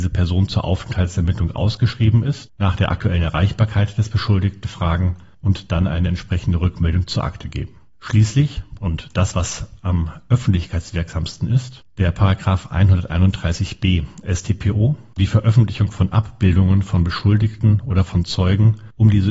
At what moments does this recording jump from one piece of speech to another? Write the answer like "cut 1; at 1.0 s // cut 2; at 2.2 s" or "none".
cut 1; at 15.2 s